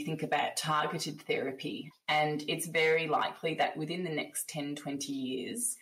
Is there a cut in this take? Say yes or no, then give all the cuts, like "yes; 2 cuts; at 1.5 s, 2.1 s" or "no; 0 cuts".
yes; 1 cut; at 1.9 s